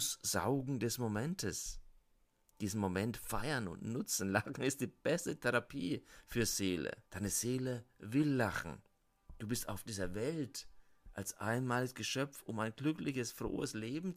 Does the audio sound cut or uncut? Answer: cut